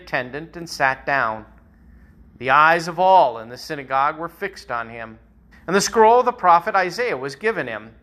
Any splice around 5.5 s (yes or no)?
yes